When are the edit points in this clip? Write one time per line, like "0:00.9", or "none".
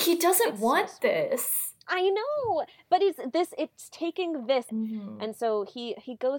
0:04.7